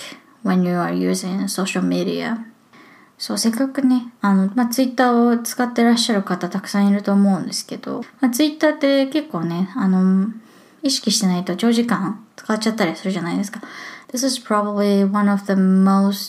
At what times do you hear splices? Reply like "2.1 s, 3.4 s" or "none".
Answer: 14.0 s